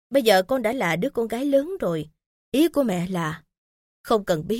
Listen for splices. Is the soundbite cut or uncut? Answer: cut